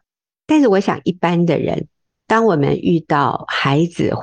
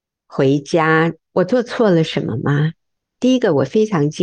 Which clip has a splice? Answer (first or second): second